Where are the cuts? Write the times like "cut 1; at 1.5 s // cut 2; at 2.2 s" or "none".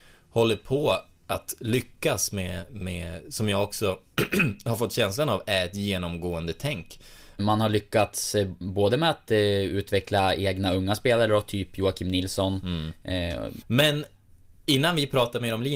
cut 1; at 7.4 s // cut 2; at 13.6 s